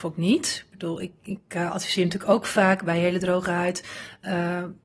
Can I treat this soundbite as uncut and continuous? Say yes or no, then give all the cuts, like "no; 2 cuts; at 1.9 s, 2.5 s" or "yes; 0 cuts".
yes; 0 cuts